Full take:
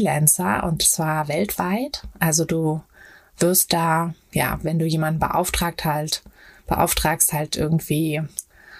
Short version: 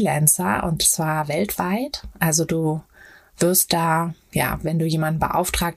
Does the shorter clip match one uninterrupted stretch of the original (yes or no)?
yes